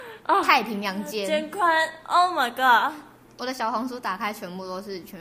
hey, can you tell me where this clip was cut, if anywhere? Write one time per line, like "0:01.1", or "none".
0:03.4